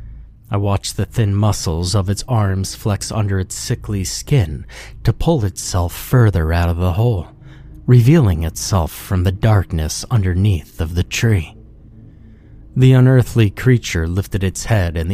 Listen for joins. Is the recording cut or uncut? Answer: uncut